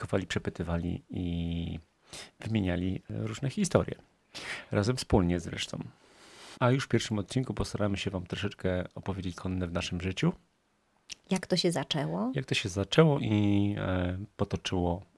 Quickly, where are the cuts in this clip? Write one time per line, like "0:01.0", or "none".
0:06.5
0:09.3